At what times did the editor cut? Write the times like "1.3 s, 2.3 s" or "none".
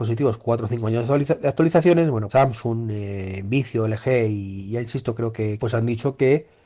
2.3 s, 5.6 s

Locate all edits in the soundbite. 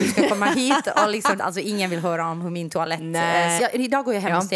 1.4 s, 3.6 s

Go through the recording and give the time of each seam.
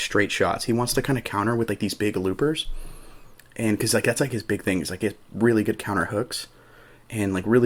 none

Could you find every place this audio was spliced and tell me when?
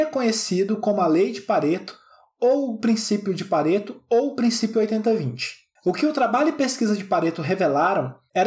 none

